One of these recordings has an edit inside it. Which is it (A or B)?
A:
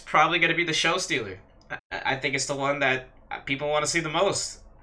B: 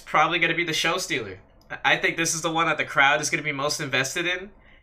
A